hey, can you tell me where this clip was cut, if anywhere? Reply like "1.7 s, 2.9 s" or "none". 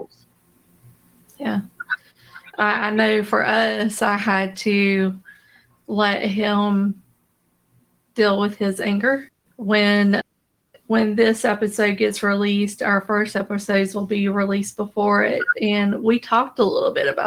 none